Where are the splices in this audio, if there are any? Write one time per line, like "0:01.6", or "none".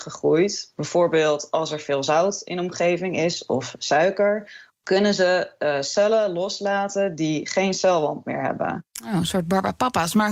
0:04.7